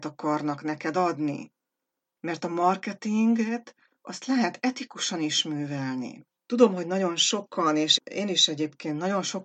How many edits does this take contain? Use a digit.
1